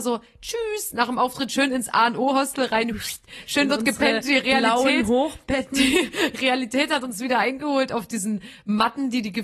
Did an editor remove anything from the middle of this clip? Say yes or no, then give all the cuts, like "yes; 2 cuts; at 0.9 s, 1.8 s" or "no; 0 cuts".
no; 0 cuts